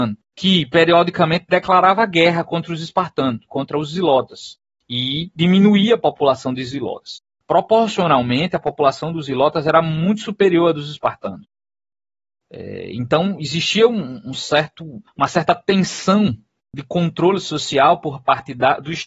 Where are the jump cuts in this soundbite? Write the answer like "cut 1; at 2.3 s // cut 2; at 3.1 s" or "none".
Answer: none